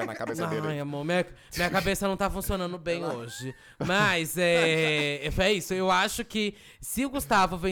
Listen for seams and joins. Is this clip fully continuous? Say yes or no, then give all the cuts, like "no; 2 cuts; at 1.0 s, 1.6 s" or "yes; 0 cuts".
yes; 0 cuts